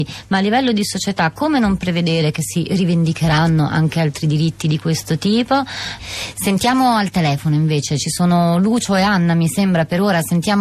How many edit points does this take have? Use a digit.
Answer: 1